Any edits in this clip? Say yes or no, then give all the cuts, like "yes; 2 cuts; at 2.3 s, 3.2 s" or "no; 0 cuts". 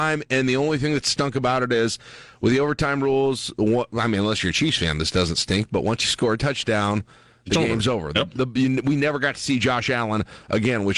no; 0 cuts